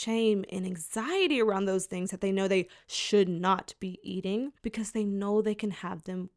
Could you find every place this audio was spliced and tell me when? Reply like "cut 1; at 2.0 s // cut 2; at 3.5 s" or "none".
cut 1; at 4.6 s